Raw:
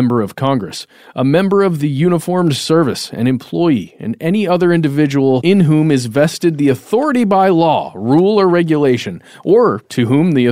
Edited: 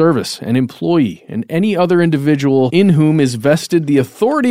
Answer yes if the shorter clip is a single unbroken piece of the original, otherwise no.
yes